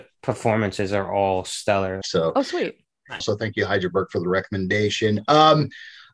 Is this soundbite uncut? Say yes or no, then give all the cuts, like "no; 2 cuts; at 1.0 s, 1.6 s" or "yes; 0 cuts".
no; 2 cuts; at 2.0 s, 3.2 s